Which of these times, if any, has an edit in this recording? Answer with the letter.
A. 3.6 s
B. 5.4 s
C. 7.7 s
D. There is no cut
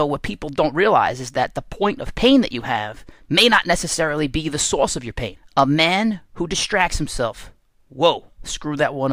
B